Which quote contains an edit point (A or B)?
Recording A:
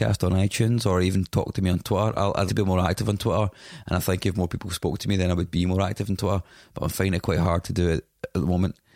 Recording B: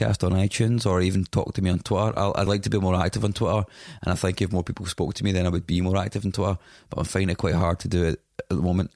A